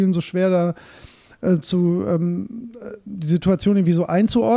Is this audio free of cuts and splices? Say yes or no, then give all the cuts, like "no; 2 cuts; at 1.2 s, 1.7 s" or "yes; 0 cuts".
yes; 0 cuts